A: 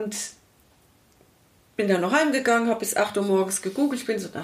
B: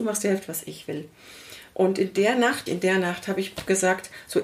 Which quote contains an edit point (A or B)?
B